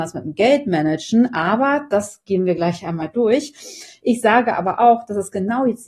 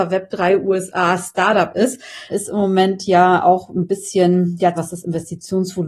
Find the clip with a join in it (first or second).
second